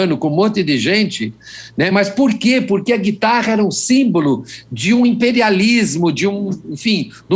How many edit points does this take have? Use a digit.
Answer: 0